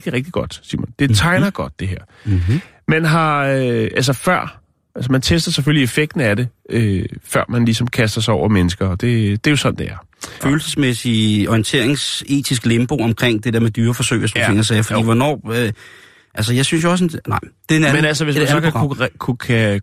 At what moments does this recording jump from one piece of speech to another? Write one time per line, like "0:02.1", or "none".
0:10.4